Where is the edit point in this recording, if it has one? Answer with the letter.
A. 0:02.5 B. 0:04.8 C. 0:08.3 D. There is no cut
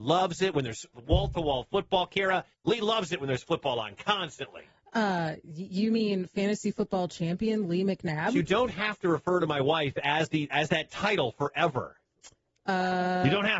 A